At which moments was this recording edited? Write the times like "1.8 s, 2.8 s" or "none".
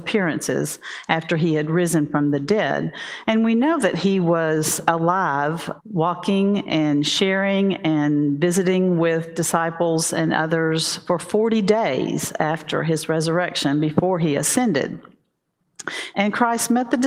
5.8 s, 16.1 s